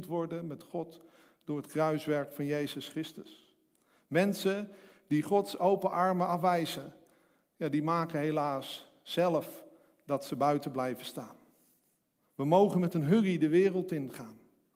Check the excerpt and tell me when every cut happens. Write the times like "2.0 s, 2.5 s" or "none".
12.3 s